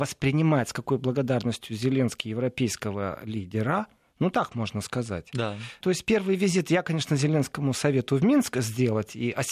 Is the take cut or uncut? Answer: cut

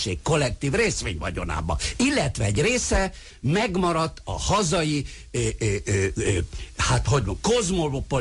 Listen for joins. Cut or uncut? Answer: uncut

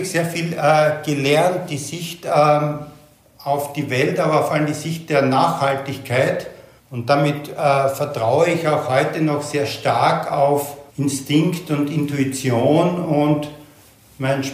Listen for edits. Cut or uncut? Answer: cut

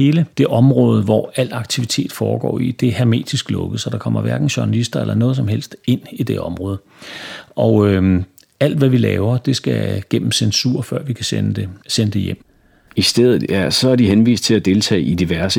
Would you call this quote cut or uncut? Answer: uncut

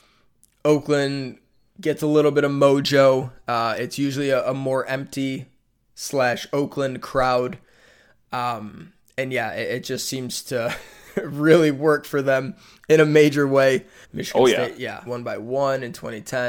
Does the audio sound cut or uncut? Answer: cut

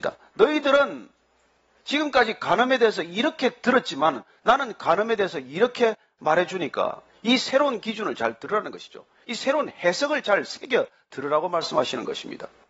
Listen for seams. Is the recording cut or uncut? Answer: uncut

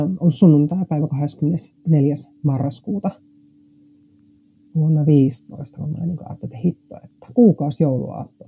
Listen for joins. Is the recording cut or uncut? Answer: uncut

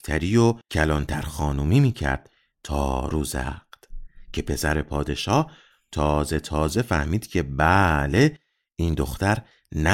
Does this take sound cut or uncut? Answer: uncut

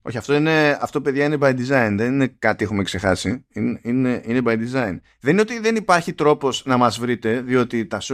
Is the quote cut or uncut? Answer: uncut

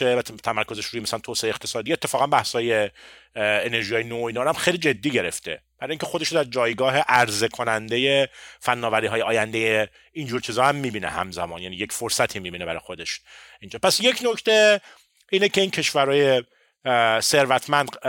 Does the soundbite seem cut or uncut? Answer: uncut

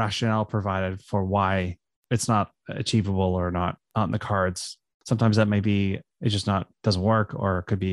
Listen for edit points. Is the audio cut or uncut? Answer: uncut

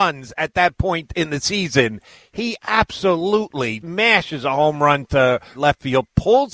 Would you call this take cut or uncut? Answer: cut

